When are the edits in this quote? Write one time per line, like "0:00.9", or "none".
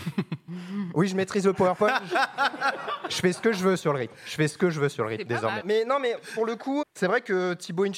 0:05.6
0:06.8